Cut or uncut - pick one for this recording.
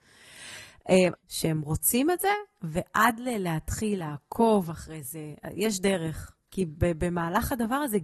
cut